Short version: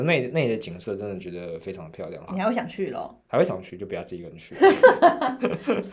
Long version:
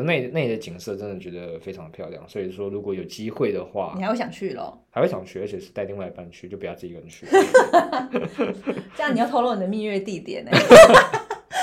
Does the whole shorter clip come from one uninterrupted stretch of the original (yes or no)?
no